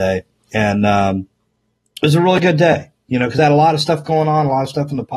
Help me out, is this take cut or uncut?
uncut